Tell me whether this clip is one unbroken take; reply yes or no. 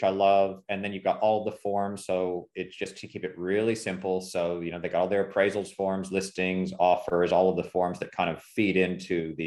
yes